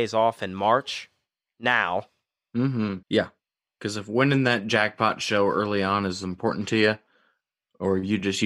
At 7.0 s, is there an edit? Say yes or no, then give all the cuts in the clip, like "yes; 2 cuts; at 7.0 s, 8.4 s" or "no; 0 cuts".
no; 1 cut; at 3.0 s